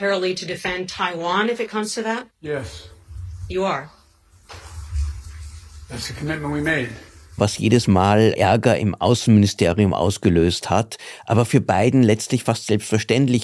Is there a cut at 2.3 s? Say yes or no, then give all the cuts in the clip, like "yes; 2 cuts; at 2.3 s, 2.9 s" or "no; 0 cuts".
yes; 1 cut; at 2.3 s